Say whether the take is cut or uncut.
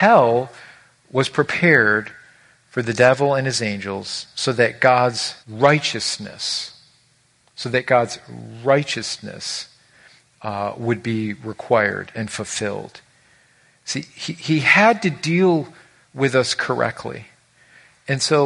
cut